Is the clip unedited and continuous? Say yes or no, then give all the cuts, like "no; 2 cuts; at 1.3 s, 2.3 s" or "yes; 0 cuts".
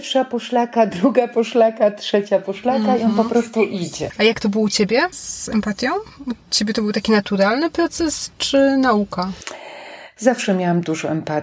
no; 2 cuts; at 5.1 s, 10.2 s